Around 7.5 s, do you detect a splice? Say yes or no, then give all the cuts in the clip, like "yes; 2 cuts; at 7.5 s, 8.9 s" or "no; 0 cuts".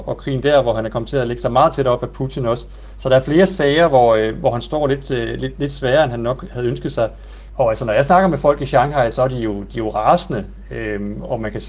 yes; 1 cut; at 7.5 s